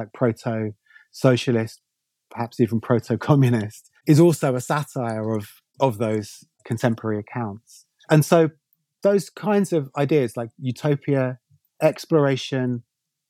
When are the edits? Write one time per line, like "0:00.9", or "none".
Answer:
0:11.6